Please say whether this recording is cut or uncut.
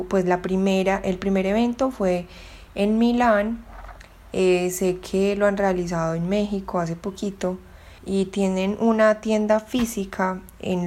cut